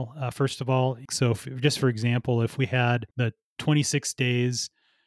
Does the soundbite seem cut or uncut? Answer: cut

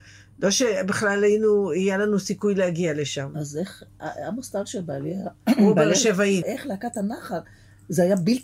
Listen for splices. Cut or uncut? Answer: cut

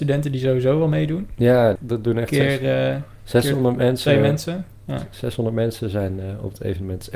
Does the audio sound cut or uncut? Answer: cut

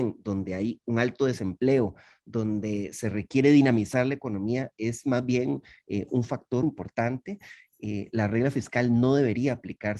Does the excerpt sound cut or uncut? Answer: cut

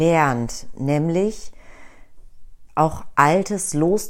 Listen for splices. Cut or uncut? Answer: cut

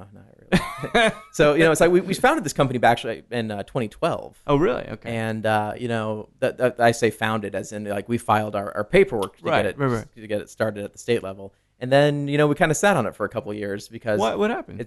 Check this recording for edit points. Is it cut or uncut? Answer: uncut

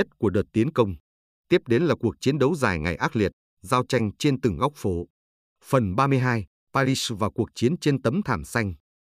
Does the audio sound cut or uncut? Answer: uncut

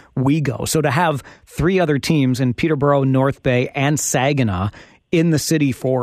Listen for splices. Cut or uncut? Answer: uncut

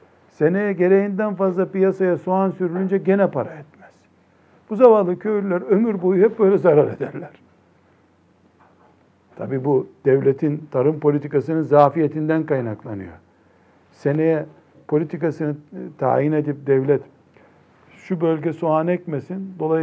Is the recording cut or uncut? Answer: uncut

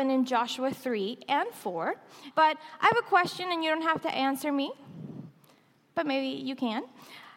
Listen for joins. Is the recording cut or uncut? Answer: cut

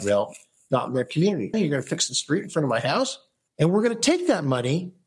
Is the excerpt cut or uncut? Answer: cut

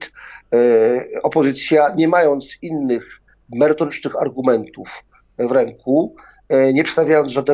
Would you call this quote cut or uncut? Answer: uncut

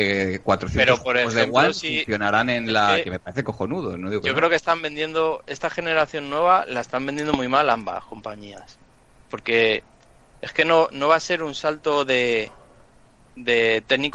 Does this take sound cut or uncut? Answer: uncut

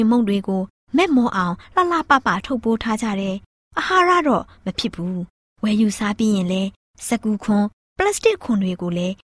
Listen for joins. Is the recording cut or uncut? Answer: uncut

